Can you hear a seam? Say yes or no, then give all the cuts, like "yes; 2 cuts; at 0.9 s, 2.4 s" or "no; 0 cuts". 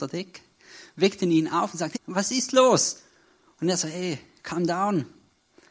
yes; 1 cut; at 1.9 s